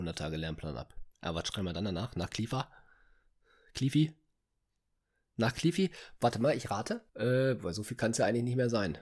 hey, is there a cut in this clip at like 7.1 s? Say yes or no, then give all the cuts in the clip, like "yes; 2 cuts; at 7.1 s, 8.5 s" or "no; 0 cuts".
yes; 1 cut; at 7.1 s